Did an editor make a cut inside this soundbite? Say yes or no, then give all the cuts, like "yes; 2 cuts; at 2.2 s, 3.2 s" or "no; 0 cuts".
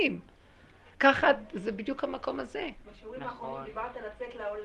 yes; 2 cuts; at 0.9 s, 2.8 s